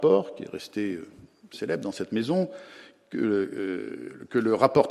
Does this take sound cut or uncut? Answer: uncut